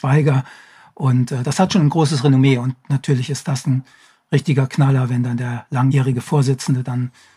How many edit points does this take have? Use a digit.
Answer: 1